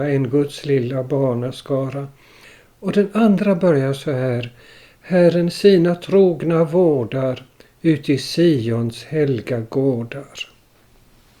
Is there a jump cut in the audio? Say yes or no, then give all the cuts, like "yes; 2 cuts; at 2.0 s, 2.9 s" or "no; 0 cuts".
no; 0 cuts